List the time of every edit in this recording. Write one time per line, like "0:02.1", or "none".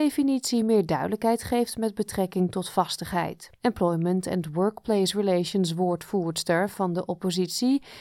0:03.6

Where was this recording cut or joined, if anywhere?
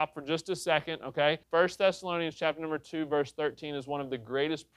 0:01.4

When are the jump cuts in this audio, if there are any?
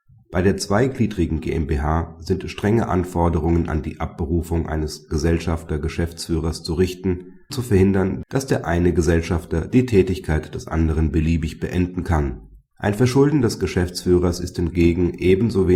0:07.5
0:12.7

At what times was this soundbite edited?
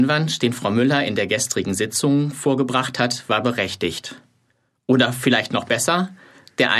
none

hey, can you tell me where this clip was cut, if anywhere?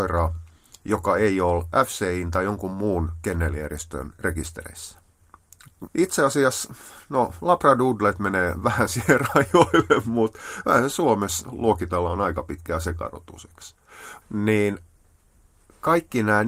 0:05.9
0:14.2

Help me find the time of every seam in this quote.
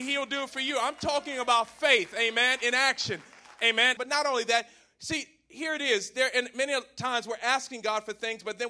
0:04.0

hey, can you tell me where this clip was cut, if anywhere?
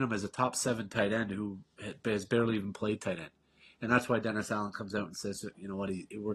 none

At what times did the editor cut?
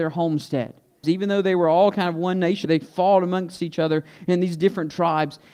0:01.0
0:02.6

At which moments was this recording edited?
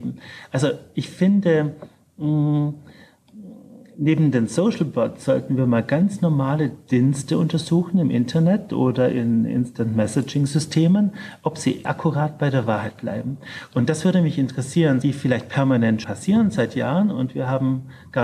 0:11.8
0:15.0
0:16.0

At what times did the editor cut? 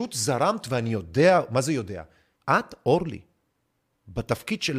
0:02.3

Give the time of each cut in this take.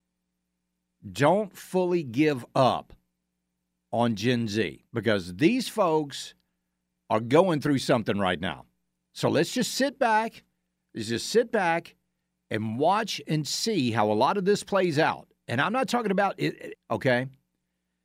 0:04.9
0:16.7

